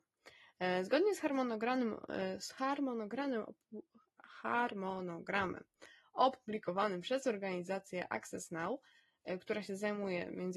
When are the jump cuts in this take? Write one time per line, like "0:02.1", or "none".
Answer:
none